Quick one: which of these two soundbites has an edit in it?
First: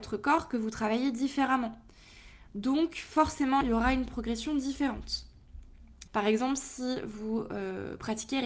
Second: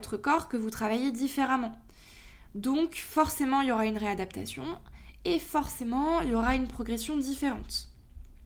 first; 2 cuts; at 3.6 s, 6.1 s

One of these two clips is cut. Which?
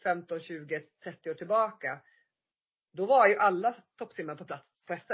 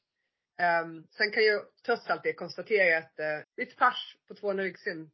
second; 2 cuts; at 1.1 s, 3.4 s

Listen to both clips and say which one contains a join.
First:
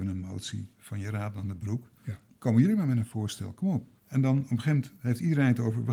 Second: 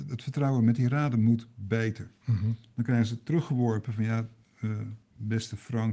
first; 1 cut; at 4.0 s

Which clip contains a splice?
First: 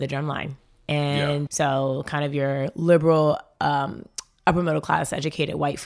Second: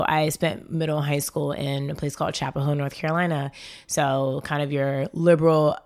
first; 1 cut; at 1.5 s

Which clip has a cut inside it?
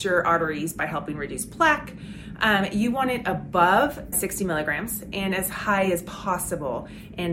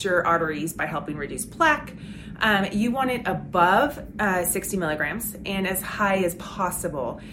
first; 1 cut; at 4.1 s

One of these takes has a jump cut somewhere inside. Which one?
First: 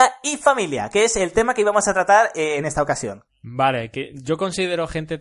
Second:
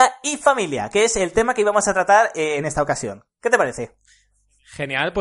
first; 1 cut; at 3.3 s

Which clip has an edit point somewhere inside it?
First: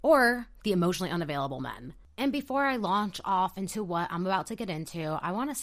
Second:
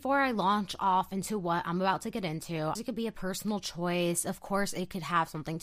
second; 1 cut; at 2.8 s

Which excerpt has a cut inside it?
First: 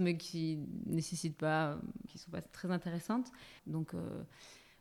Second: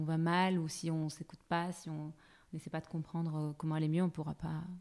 first; 2 cuts; at 2.1 s, 3.6 s

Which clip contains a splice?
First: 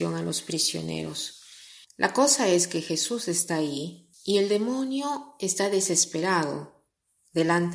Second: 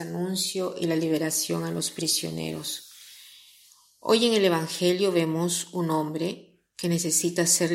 first; 2 cuts; at 1.8 s, 4.1 s

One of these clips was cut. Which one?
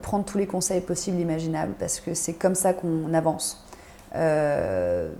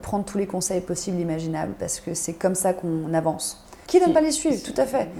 second; 1 cut; at 3.9 s

